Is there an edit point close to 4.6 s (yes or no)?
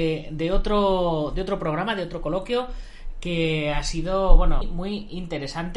yes